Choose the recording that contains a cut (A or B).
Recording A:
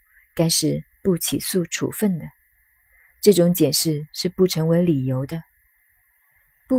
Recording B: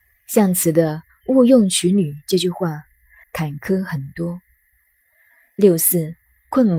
B